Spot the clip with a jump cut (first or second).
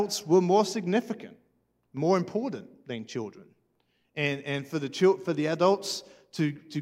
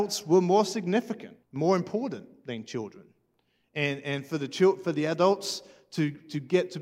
second